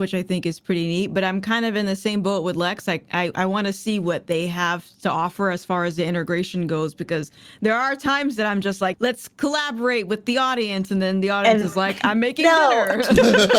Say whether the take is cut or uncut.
cut